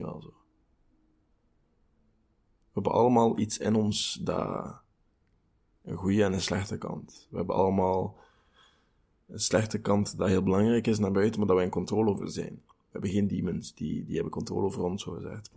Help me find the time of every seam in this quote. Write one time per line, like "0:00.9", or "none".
none